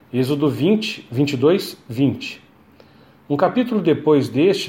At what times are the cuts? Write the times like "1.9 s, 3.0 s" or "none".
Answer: none